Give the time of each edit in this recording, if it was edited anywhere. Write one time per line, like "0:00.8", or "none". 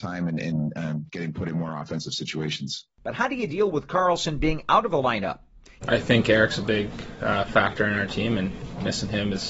0:05.8